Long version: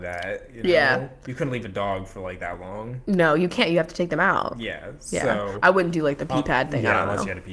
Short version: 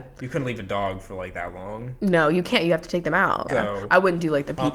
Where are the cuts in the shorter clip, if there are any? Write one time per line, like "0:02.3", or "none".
0:03.5